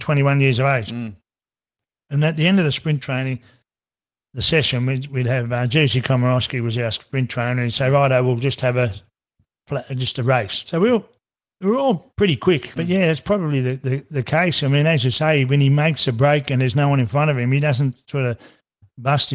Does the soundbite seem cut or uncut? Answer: cut